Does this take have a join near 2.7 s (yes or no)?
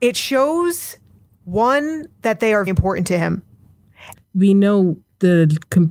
yes